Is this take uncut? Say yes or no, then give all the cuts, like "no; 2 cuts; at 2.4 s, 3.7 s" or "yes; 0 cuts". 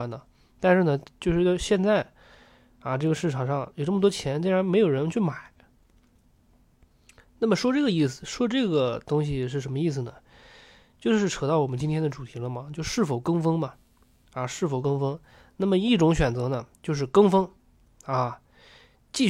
no; 2 cuts; at 15.5 s, 16.7 s